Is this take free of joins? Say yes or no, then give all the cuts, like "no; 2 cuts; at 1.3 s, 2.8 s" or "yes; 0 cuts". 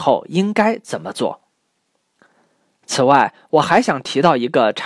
yes; 0 cuts